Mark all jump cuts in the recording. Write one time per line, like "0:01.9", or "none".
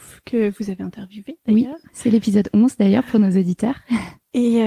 none